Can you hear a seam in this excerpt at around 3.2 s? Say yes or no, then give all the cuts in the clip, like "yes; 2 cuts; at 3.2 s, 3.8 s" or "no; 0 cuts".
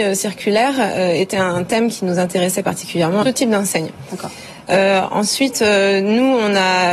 yes; 1 cut; at 3.2 s